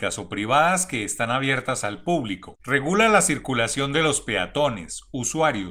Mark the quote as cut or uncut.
cut